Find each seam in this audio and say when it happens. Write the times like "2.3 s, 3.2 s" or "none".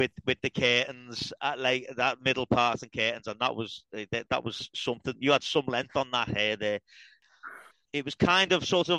none